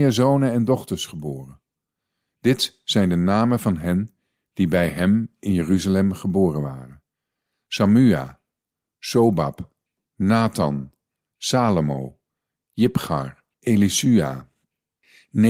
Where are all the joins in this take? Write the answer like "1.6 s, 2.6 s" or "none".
13.5 s